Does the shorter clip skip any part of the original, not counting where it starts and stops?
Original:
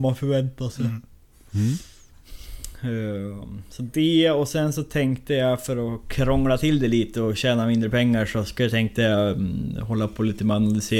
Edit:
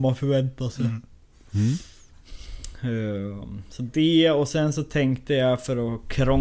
no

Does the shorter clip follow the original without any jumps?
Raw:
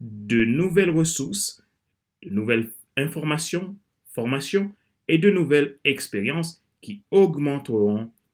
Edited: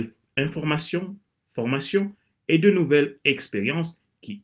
yes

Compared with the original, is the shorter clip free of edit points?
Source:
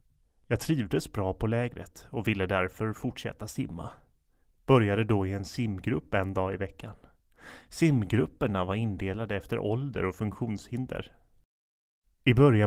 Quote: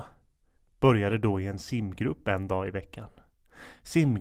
yes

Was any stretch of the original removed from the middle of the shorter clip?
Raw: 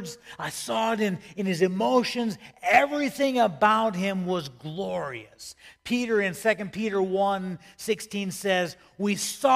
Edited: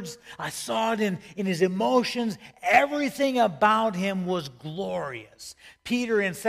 no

